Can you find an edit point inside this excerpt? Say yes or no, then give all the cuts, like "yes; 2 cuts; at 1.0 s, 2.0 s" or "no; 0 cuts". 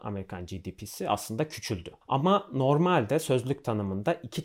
yes; 1 cut; at 2.0 s